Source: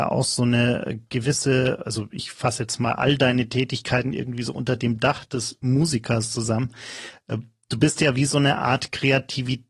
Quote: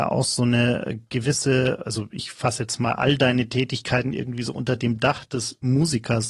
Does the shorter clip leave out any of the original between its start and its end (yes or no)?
no